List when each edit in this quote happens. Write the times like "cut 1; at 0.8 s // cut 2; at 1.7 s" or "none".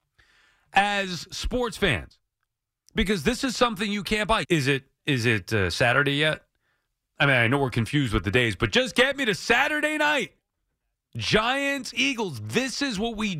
cut 1; at 4.4 s

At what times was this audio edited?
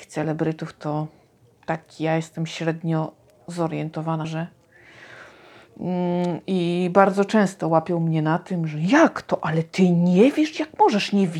cut 1; at 4.2 s

